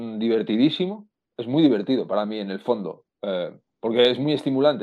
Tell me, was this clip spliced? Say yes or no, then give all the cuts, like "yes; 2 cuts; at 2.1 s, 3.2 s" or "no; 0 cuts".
no; 0 cuts